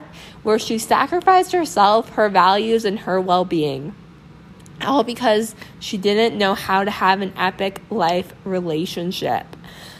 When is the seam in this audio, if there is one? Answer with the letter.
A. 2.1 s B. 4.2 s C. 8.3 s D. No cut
D